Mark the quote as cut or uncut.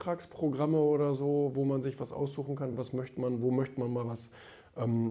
uncut